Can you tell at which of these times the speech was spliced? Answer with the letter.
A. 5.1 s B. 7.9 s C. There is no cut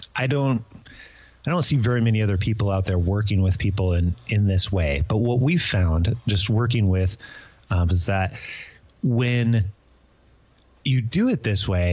B